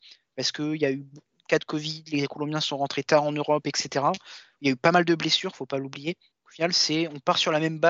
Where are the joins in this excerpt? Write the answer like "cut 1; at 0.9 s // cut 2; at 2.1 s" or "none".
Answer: cut 1; at 6.3 s

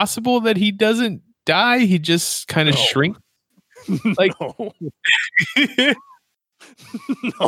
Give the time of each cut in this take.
none

